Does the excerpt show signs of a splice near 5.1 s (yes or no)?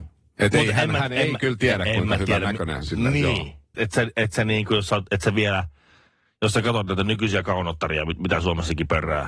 yes